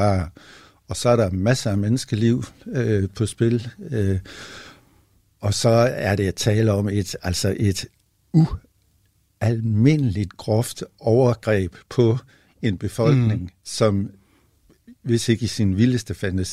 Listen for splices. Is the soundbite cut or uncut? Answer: uncut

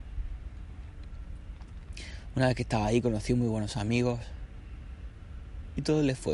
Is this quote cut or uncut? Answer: uncut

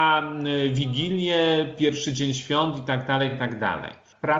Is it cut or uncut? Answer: uncut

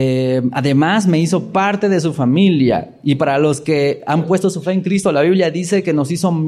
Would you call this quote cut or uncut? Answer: uncut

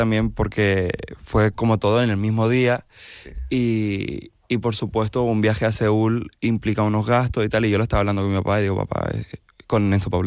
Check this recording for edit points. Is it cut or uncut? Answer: uncut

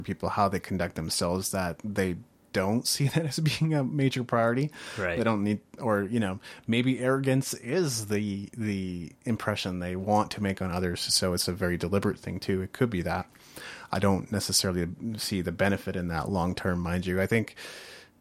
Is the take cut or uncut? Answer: uncut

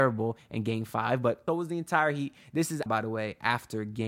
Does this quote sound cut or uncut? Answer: cut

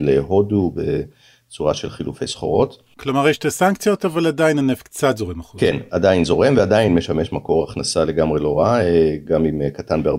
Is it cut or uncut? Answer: uncut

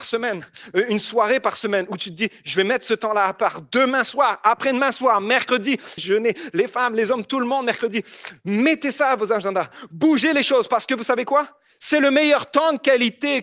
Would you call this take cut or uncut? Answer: cut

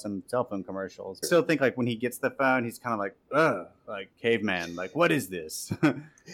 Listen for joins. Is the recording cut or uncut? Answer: cut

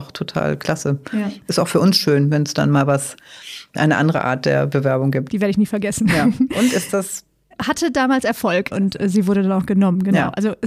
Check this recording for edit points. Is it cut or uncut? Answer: cut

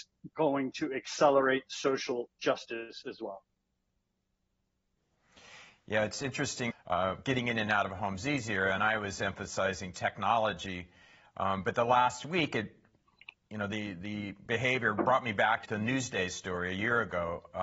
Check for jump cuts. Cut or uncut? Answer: cut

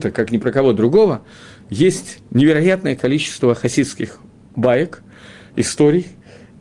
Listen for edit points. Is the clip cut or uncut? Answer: uncut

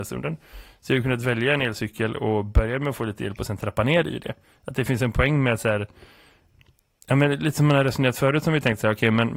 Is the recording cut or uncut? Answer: uncut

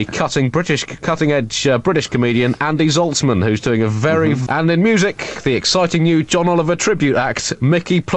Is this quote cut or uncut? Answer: cut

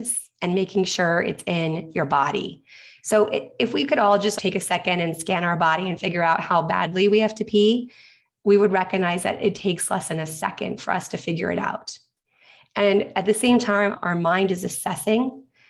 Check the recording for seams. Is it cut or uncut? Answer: uncut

